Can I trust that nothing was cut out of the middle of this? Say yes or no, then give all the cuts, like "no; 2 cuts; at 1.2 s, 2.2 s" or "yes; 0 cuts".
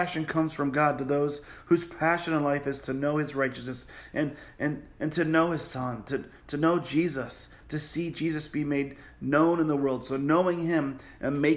yes; 0 cuts